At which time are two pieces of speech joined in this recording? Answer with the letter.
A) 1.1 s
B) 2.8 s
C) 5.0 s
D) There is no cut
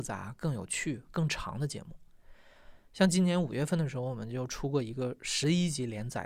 D